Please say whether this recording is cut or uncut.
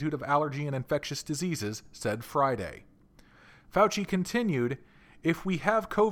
cut